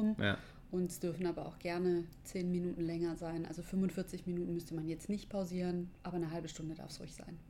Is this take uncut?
yes; 0 cuts

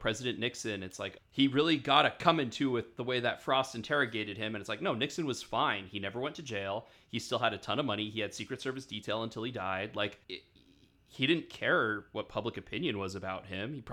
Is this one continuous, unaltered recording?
no; 2 cuts; at 1.2 s, 10.2 s

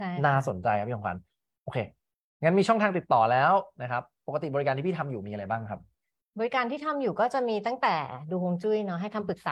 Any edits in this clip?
no; 0 cuts

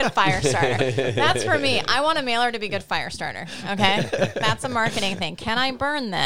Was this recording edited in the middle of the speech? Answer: no; 0 cuts

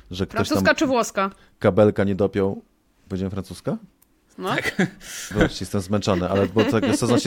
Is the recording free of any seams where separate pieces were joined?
no; 1 cut; at 5.3 s

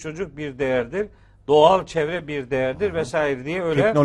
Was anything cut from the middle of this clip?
no; 0 cuts

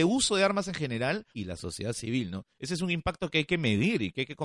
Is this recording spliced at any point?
no; 0 cuts

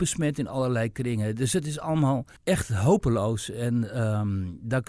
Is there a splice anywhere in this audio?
yes; 1 cut; at 2.4 s

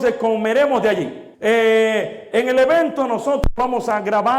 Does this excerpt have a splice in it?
yes; 1 cut; at 1.3 s

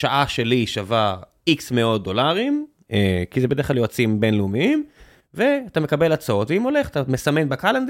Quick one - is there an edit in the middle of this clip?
no; 0 cuts

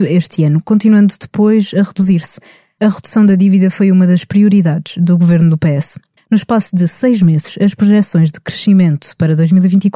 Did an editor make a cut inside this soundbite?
yes; 1 cut; at 6.2 s

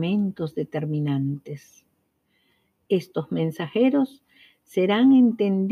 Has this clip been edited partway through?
no; 0 cuts

